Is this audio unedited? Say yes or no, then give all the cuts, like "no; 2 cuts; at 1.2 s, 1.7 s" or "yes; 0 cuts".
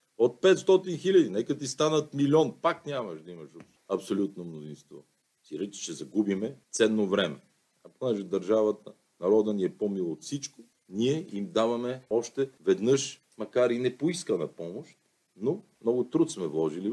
yes; 0 cuts